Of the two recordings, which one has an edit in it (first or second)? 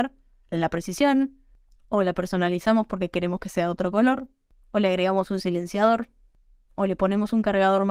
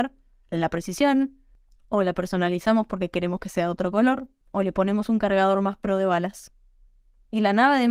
second